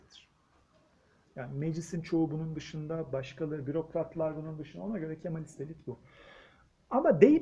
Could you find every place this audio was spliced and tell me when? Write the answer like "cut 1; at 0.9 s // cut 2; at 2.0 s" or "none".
none